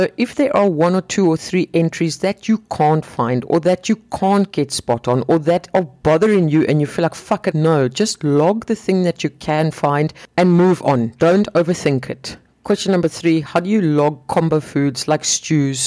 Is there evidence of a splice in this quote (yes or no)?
yes